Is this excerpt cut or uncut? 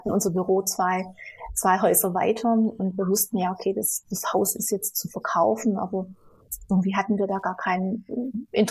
uncut